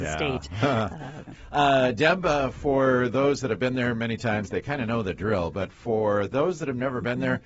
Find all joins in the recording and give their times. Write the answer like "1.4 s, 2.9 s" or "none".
1.3 s